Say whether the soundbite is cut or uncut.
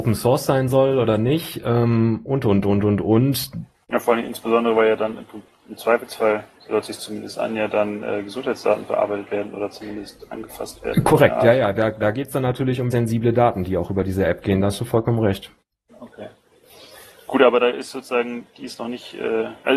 cut